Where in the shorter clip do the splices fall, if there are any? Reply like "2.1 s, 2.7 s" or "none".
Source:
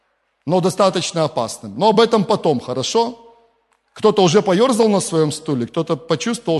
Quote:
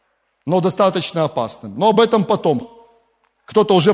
2.6 s